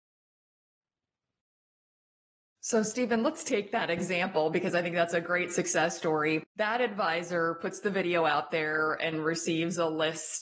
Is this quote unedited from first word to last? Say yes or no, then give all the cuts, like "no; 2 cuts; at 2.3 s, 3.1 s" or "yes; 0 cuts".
no; 1 cut; at 6.5 s